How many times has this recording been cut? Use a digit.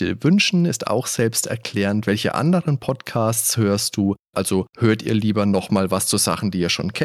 1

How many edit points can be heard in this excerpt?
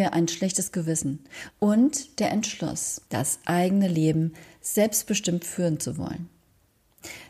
2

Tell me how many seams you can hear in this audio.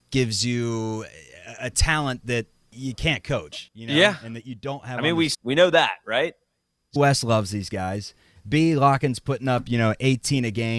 2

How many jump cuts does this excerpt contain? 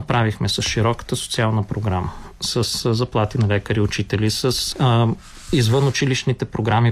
1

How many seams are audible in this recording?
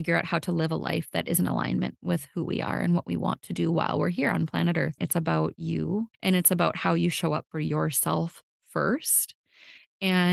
2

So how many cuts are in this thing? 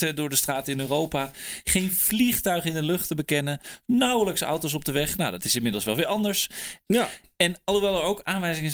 1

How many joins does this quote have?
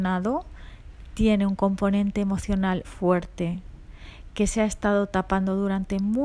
1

